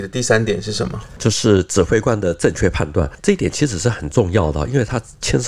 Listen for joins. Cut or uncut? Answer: uncut